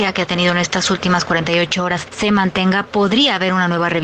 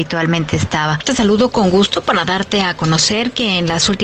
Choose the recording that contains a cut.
second; 1 cut; at 1.0 s

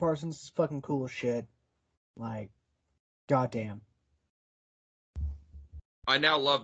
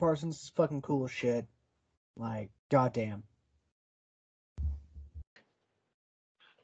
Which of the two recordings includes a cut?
second; 2 cuts; at 2.6 s, 5.4 s

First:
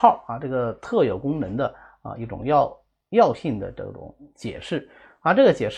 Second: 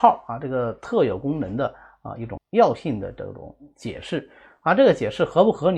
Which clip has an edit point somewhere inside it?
second; 1 cut; at 2.4 s

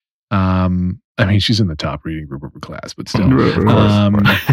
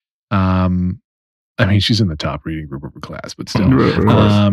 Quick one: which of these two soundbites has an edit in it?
first; 1 cut; at 1.1 s

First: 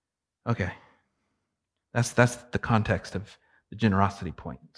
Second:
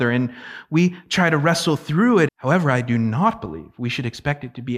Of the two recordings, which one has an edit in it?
second; 1 cut; at 2.3 s

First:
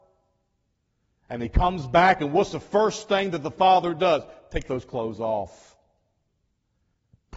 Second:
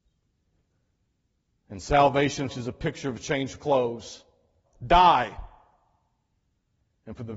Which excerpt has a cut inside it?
second; 2 cuts; at 2.5 s, 4.7 s

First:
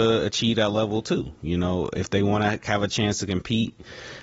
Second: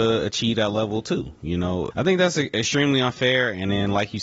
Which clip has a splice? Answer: second; 1 cut; at 1.9 s

